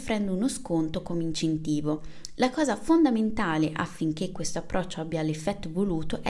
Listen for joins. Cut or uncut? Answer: uncut